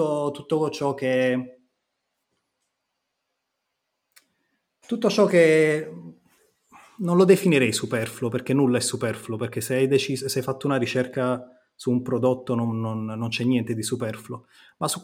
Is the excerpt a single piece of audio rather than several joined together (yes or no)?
yes